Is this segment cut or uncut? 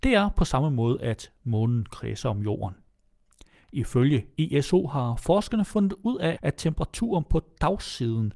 cut